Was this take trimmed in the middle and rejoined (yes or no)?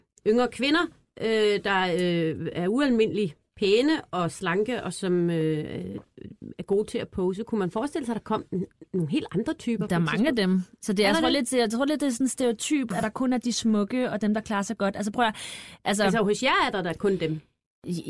no